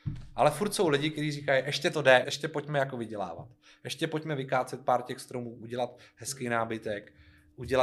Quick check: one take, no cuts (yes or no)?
no